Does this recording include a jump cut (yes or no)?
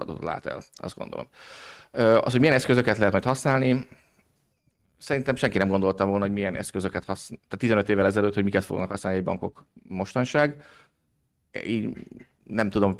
no